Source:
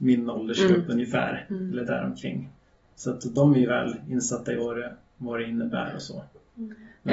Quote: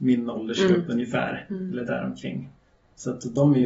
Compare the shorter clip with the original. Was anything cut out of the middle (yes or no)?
no